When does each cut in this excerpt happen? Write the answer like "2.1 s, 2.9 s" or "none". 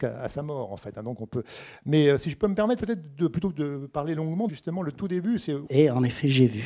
4.5 s, 5.7 s